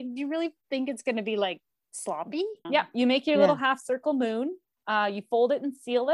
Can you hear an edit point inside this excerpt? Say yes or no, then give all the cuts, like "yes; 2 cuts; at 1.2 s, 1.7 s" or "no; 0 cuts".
yes; 1 cut; at 2.6 s